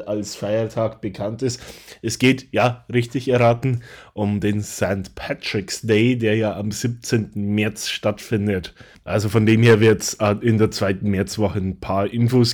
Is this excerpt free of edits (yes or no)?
yes